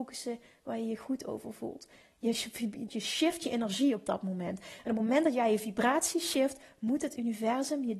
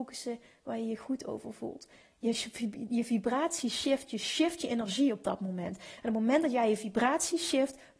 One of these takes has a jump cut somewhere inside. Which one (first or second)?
first